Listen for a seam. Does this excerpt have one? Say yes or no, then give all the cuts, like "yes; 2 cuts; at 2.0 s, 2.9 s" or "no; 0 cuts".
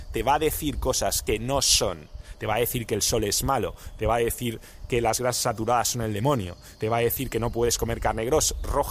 no; 0 cuts